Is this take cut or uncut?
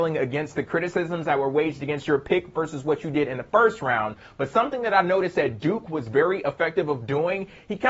uncut